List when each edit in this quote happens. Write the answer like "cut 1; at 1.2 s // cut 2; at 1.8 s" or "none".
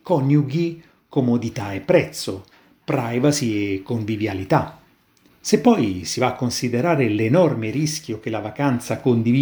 cut 1; at 5.3 s